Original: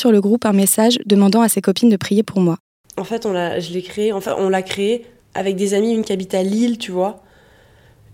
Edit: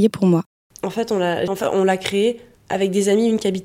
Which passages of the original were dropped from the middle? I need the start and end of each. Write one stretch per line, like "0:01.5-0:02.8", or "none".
0:03.6-0:04.1